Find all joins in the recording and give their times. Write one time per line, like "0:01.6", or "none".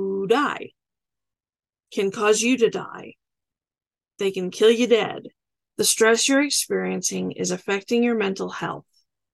0:05.7